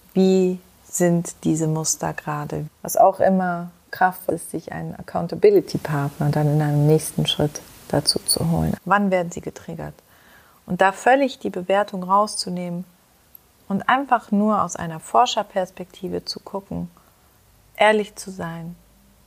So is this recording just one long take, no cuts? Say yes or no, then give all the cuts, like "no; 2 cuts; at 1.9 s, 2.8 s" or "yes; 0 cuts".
no; 3 cuts; at 2.7 s, 4.3 s, 8.8 s